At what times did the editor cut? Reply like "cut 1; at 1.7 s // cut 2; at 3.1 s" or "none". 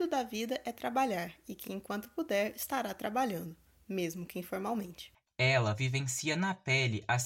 none